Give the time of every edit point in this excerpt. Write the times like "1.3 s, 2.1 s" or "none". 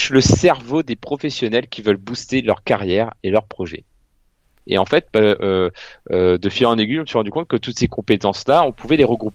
4.6 s